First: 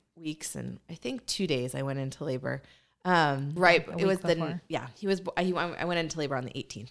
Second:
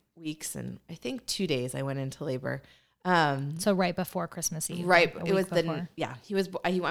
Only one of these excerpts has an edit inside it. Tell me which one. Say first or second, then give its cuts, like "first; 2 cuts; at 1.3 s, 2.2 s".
first; 1 cut; at 3.6 s